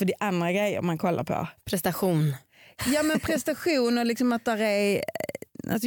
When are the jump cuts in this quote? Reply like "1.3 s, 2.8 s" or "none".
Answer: none